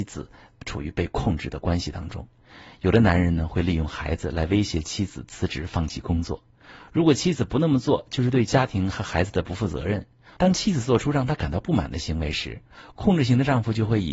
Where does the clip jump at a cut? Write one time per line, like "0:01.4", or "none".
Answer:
0:10.4